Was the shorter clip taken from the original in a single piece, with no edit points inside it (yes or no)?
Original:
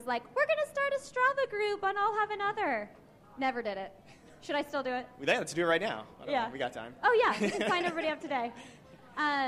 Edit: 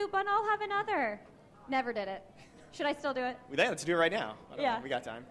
yes